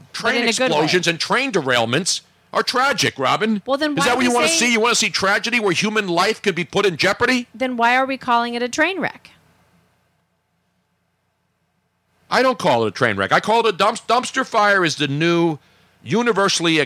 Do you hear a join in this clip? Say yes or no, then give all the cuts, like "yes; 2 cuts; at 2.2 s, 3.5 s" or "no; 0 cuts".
no; 0 cuts